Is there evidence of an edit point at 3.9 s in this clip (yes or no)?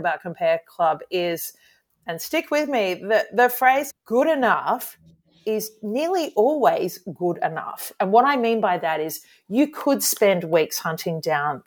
yes